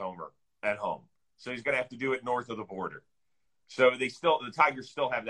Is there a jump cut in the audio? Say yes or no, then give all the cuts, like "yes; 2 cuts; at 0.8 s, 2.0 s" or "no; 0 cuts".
no; 0 cuts